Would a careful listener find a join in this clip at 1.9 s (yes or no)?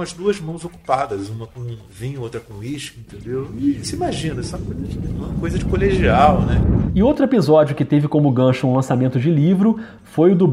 yes